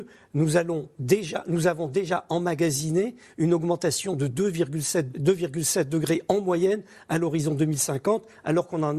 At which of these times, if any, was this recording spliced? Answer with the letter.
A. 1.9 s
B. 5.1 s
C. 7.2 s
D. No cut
B